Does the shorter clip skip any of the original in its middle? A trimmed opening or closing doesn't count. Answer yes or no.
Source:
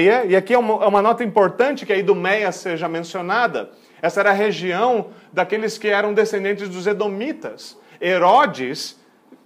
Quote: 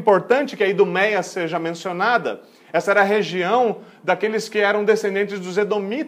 no